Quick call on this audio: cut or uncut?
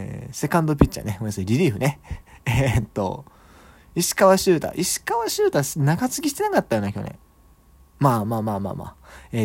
uncut